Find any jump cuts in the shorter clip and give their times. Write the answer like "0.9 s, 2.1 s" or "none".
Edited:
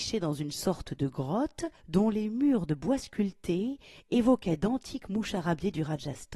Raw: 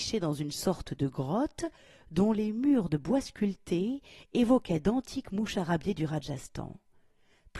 1.8 s